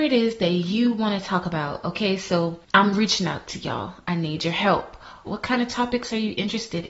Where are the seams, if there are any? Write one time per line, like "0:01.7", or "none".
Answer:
0:02.6
0:05.3